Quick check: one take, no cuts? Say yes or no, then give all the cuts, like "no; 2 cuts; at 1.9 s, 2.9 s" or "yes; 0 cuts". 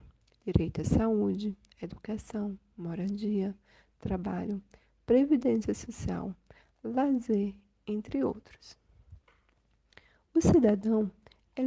yes; 0 cuts